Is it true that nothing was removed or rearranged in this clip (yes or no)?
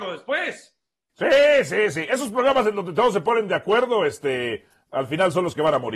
yes